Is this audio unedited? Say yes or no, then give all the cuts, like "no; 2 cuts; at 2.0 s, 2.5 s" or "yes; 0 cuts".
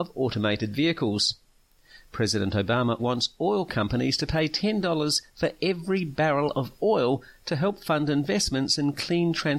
no; 1 cut; at 3.0 s